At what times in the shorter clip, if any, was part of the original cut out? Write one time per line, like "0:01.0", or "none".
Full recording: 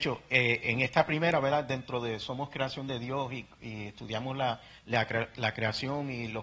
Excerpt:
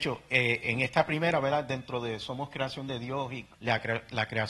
0:03.5